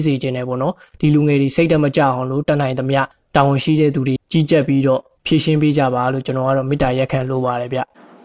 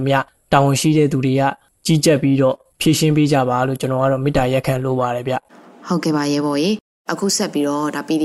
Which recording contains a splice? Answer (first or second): first